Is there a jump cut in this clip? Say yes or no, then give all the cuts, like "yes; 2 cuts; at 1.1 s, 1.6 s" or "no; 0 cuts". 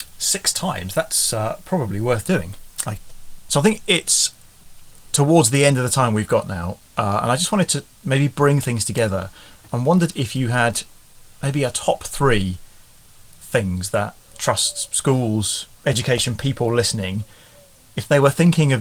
yes; 1 cut; at 3.0 s